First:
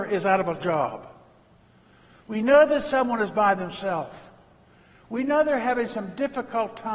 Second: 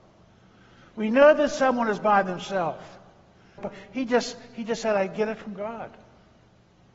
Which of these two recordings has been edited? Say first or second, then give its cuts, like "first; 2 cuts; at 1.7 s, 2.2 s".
second; 1 cut; at 3.6 s